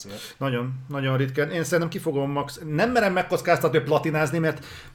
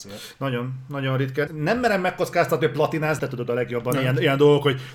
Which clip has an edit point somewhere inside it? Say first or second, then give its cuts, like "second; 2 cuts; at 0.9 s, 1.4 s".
second; 2 cuts; at 1.5 s, 3.2 s